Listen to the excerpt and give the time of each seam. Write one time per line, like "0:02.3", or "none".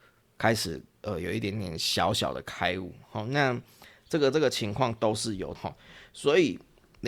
0:05.5